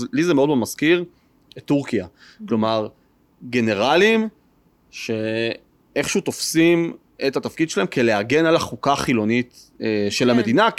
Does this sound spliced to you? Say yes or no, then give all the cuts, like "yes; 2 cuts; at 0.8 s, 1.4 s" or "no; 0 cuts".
no; 0 cuts